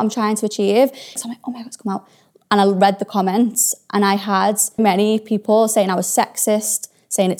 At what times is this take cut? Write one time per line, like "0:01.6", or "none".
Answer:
0:01.2
0:04.8

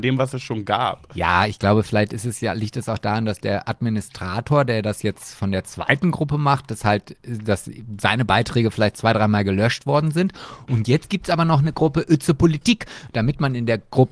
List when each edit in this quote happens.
none

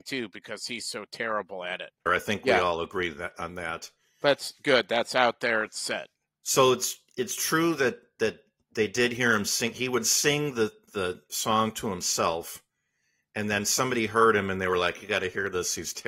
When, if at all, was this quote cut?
0:02.1

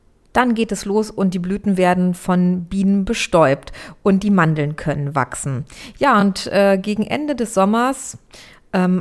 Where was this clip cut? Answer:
none

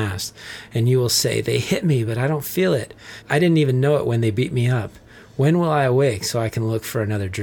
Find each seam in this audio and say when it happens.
none

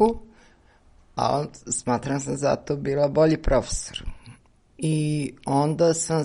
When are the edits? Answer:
0:04.7

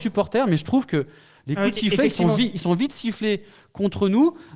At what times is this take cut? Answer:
none

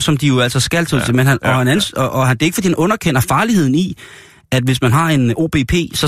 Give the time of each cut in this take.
none

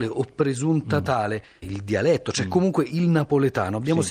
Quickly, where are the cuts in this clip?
0:01.6

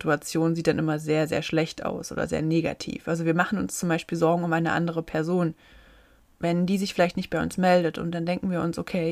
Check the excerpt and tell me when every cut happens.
none

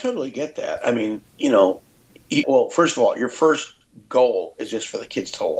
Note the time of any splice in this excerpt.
0:01.2
0:02.4

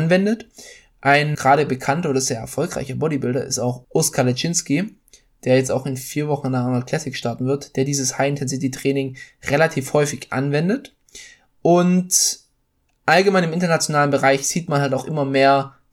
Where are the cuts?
0:01.3
0:03.8

